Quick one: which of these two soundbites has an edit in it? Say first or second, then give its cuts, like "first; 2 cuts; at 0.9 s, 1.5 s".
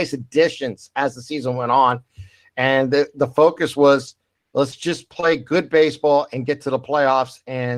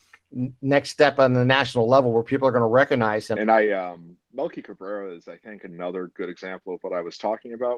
second; 1 cut; at 3.4 s